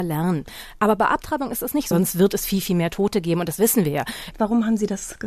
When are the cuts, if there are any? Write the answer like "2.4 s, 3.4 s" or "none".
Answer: 1.9 s, 4.3 s